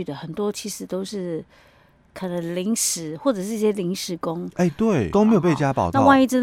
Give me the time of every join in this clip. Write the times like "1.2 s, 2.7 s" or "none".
5.1 s

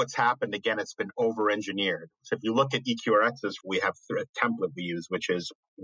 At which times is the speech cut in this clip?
3.6 s

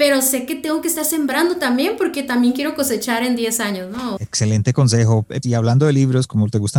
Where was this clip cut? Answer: 4.2 s, 5.4 s

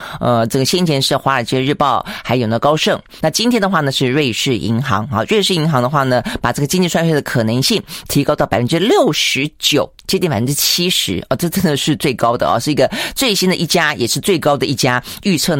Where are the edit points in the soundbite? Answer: 3.2 s, 10.0 s

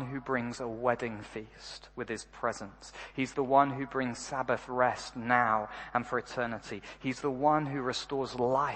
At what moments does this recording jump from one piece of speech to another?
none

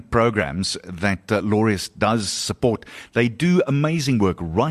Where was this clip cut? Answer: none

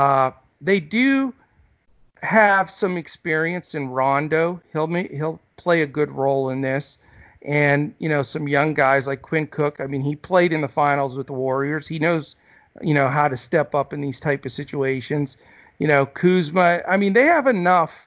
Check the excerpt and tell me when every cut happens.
none

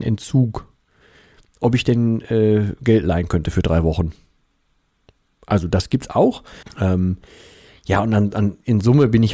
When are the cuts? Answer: 6.6 s

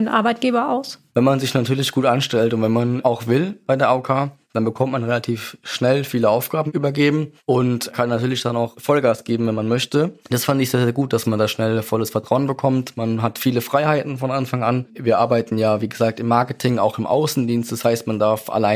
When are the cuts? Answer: 1.1 s

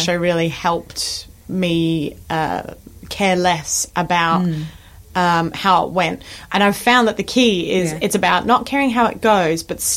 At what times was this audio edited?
none

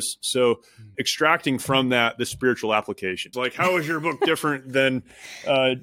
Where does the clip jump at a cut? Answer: 0.9 s, 3.3 s

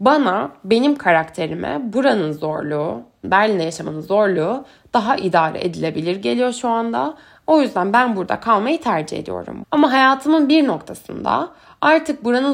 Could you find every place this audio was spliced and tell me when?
3.2 s, 9.6 s

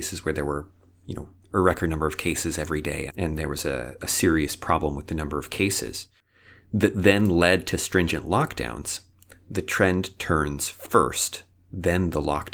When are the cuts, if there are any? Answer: 3.1 s

